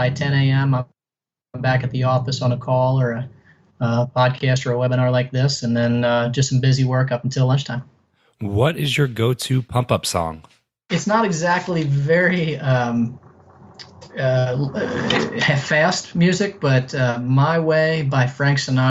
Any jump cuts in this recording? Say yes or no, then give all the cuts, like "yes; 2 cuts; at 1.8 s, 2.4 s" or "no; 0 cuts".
no; 0 cuts